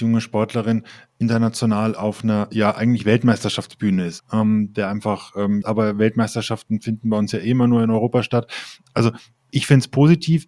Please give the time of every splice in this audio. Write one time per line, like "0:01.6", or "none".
0:04.2
0:05.6